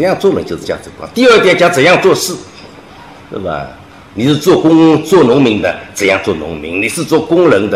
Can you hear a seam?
no; 0 cuts

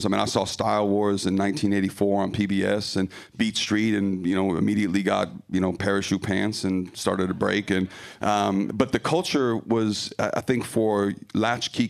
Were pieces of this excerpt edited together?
no; 0 cuts

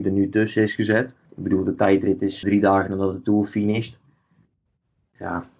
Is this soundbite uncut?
no; 2 cuts; at 1.3 s, 2.4 s

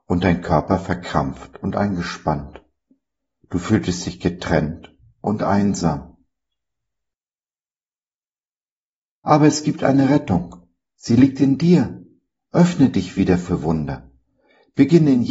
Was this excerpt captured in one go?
yes; 0 cuts

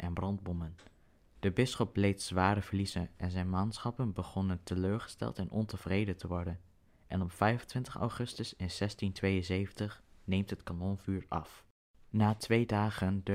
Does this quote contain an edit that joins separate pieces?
yes; 1 cut; at 1.3 s

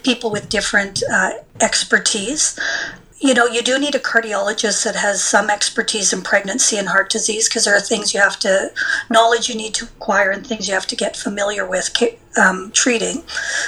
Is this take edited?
no; 0 cuts

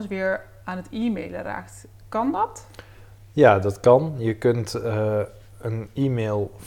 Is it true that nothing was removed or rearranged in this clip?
yes; 0 cuts

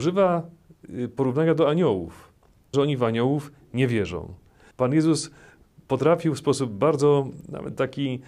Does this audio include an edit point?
yes; 2 cuts; at 2.7 s, 4.7 s

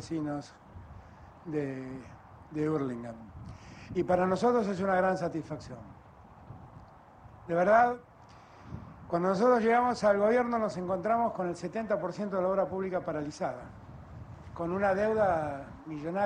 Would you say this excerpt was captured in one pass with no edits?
yes; 0 cuts

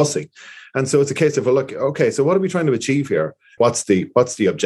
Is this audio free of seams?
no; 1 cut; at 3.6 s

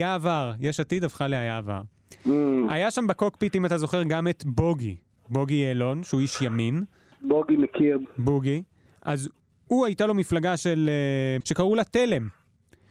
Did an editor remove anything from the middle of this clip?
yes; 2 cuts; at 8.1 s, 11.4 s

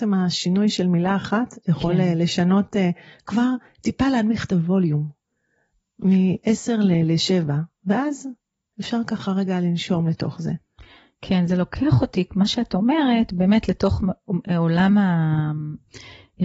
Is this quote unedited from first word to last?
yes; 0 cuts

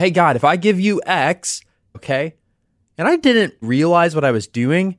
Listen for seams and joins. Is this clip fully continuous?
no; 2 cuts; at 1.9 s, 3.6 s

